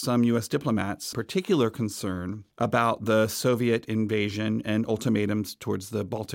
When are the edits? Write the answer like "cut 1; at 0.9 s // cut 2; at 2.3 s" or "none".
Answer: cut 1; at 1.1 s // cut 2; at 2.5 s

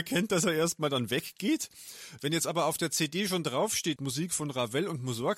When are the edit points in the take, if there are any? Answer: cut 1; at 2.2 s // cut 2; at 4.0 s

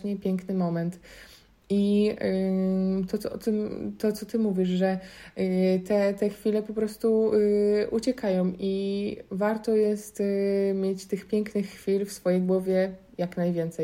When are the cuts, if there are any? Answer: none

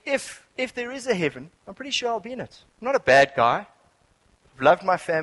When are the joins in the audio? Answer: cut 1; at 1.6 s // cut 2; at 2.7 s

